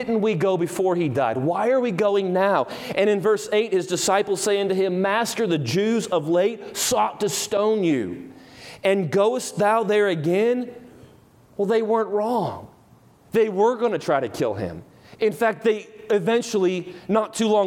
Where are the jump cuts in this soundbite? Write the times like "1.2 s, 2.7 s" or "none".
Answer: none